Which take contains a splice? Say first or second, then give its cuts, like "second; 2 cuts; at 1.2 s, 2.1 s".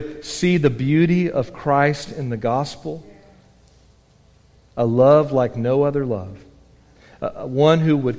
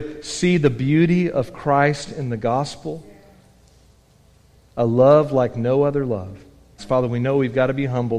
second; 1 cut; at 6.8 s